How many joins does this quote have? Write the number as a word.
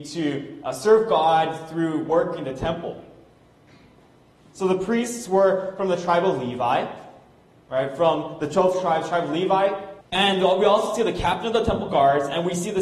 two